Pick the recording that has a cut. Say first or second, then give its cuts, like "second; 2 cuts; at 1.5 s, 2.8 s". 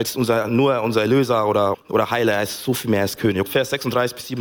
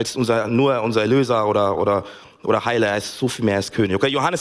first; 2 cuts; at 1.7 s, 3.5 s